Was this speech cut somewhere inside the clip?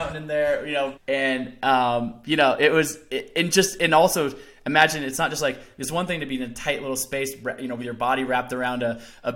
yes; 1 cut; at 0.9 s

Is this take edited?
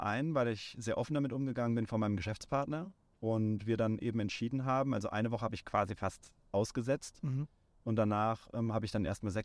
no; 0 cuts

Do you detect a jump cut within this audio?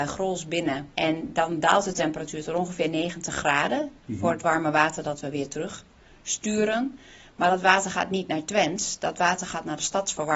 yes; 1 cut; at 0.9 s

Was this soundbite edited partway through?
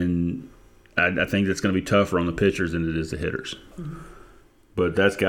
yes; 1 cut; at 3.7 s

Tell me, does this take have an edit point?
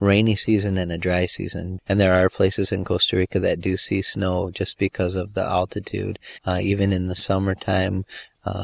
yes; 2 cuts; at 1.8 s, 6.4 s

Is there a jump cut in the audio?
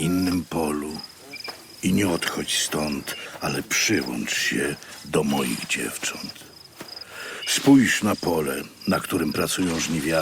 no; 0 cuts

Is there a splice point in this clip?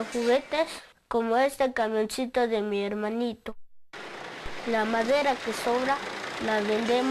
no; 0 cuts

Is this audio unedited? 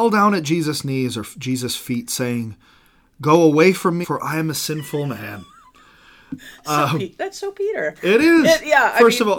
no; 1 cut; at 4.0 s

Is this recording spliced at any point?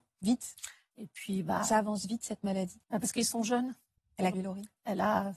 yes; 2 cuts; at 2.8 s, 4.3 s

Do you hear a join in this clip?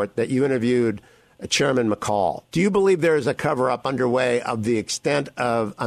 yes; 1 cut; at 2.5 s

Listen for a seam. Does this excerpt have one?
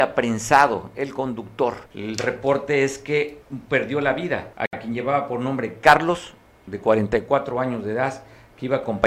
yes; 2 cuts; at 1.9 s, 4.5 s

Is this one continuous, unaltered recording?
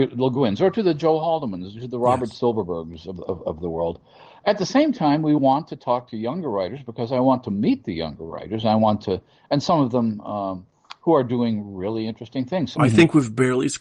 no; 1 cut; at 12.7 s

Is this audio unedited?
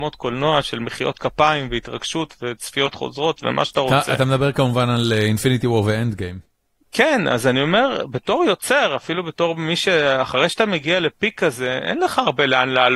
yes; 0 cuts

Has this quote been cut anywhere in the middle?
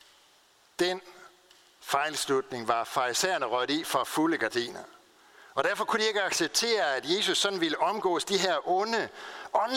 no; 0 cuts

